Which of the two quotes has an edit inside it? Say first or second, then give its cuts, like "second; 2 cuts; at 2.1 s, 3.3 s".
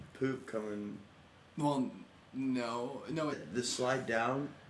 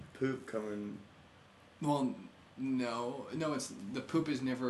first; 2 cuts; at 1.5 s, 3.3 s